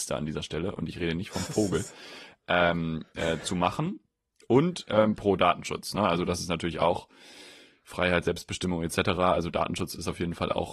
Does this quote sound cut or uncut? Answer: uncut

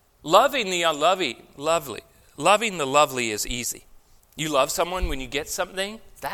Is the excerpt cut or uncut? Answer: cut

